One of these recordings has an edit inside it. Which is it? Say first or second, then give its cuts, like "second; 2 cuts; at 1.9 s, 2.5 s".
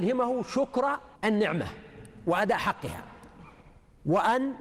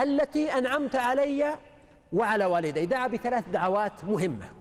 first; 1 cut; at 1.1 s